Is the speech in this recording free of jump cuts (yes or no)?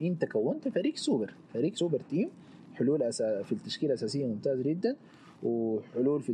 no